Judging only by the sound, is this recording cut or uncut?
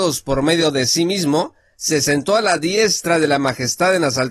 uncut